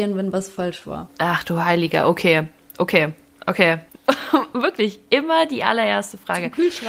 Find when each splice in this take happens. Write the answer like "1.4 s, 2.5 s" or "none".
3.9 s